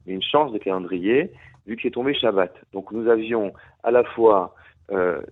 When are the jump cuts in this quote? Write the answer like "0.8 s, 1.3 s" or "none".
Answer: none